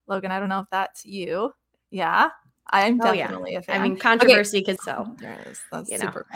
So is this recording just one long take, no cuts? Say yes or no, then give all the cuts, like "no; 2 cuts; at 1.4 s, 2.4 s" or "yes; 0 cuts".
no; 1 cut; at 4.8 s